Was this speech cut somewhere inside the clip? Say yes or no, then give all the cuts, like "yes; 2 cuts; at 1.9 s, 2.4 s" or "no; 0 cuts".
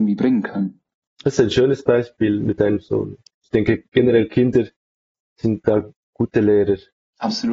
no; 0 cuts